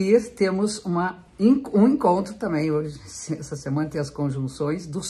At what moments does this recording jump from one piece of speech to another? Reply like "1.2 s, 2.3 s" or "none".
none